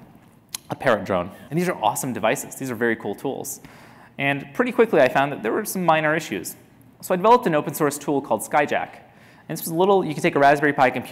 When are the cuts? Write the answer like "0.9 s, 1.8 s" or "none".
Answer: 1.5 s